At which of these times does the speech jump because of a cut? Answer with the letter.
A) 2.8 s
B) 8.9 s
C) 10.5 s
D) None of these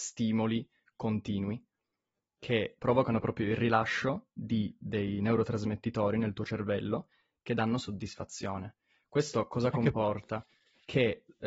A